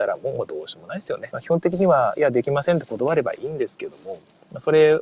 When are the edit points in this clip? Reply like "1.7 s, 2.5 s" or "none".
1.3 s